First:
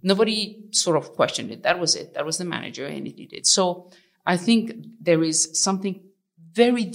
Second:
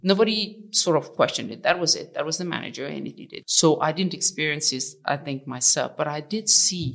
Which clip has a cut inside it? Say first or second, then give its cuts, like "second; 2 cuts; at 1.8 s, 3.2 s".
second; 1 cut; at 3.4 s